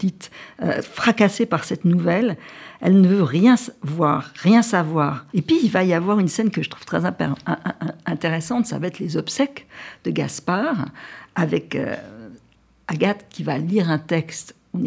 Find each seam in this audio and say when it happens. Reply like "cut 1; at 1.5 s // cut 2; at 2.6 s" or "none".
cut 1; at 5.3 s

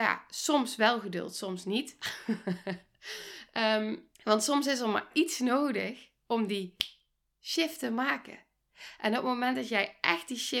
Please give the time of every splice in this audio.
cut 1; at 4.1 s

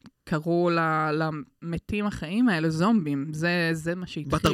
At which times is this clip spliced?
none

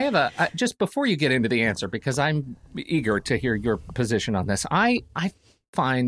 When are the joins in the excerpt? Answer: none

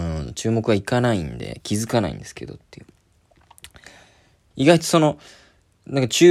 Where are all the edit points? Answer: cut 1; at 4.5 s

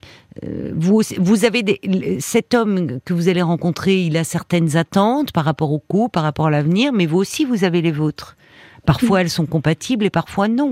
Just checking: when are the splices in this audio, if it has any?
none

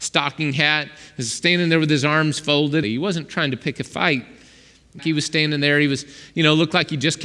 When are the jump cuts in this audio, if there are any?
cut 1; at 2.8 s // cut 2; at 5.0 s

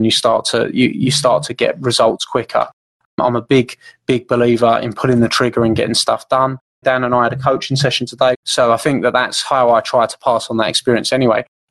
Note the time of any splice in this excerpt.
cut 1; at 6.8 s // cut 2; at 8.3 s

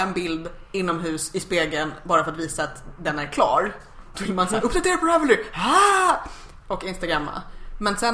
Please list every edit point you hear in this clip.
cut 1; at 4.1 s

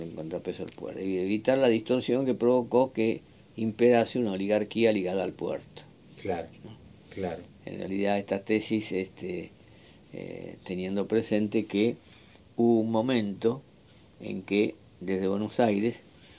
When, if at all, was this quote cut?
cut 1; at 6.6 s // cut 2; at 10.6 s

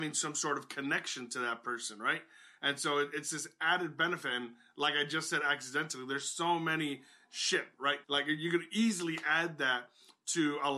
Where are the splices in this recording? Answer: cut 1; at 8.0 s

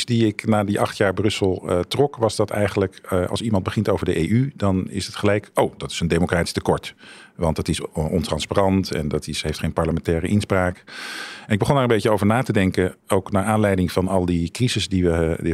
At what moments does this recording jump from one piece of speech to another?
none

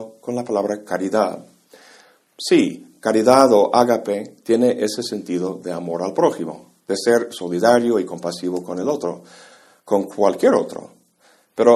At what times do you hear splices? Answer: none

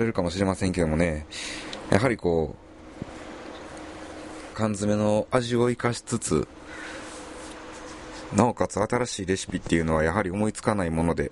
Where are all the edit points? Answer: cut 1; at 4.5 s // cut 2; at 8.3 s

